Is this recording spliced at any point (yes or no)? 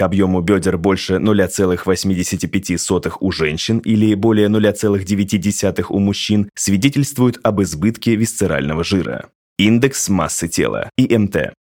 no